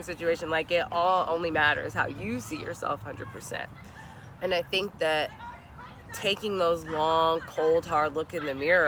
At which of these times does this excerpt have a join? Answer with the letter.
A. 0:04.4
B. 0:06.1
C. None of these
A